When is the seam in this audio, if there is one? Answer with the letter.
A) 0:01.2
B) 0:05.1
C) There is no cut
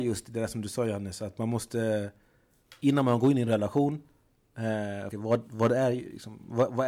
B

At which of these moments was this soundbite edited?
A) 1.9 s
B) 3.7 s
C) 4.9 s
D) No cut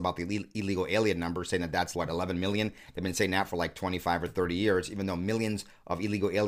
A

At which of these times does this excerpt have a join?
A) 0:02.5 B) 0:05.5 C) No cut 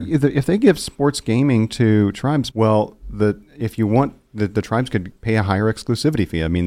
A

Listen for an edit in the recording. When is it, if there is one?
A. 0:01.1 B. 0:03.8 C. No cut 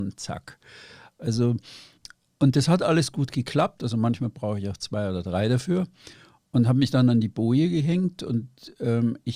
B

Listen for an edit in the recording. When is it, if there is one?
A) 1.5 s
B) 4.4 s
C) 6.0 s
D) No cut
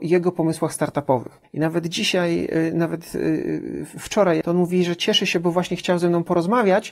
B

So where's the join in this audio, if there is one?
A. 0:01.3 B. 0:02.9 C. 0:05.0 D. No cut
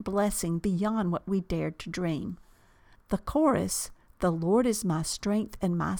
B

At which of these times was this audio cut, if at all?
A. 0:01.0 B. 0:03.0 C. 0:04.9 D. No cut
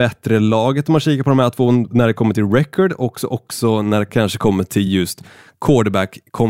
D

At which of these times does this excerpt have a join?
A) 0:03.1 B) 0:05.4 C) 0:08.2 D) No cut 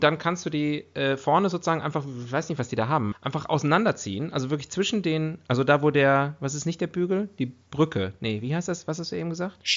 A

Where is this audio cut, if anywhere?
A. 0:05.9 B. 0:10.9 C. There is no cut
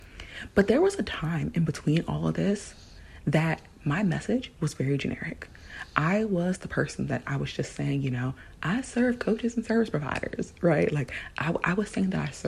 C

